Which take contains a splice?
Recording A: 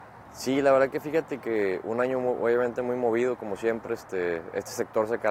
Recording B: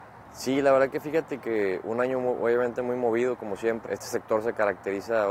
B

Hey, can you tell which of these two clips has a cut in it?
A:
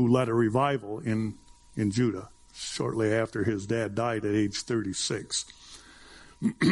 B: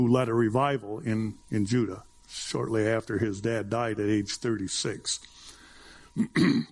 B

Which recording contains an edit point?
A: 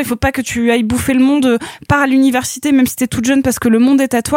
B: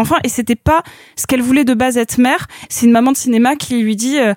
B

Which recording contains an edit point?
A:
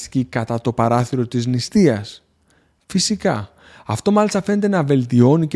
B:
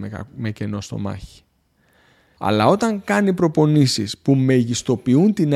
B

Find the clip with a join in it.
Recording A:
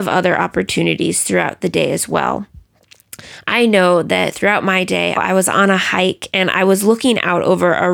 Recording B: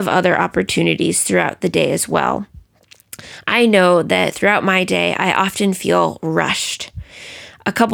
A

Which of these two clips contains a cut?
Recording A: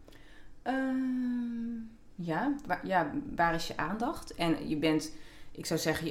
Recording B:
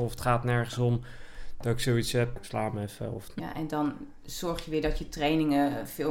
B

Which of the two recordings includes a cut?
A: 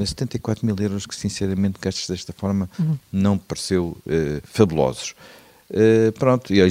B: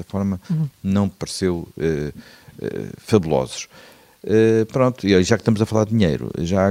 A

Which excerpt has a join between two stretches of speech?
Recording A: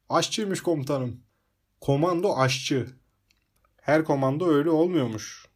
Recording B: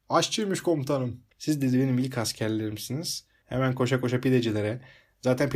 B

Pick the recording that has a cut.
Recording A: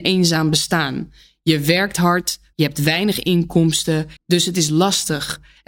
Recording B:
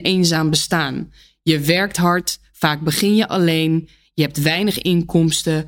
A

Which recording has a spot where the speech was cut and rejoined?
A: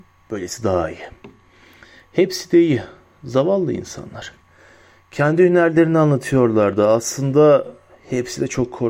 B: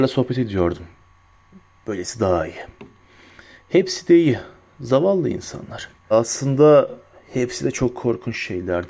B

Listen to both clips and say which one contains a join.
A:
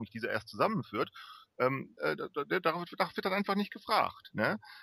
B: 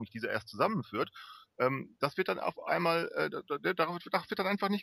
A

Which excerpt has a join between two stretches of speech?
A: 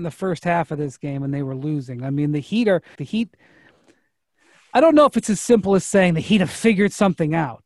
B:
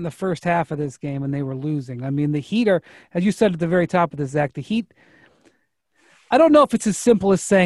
A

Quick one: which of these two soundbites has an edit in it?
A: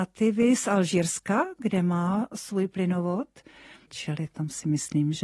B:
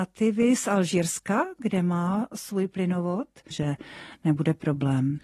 B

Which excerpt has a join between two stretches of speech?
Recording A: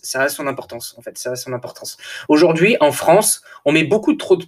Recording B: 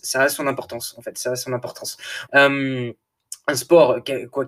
B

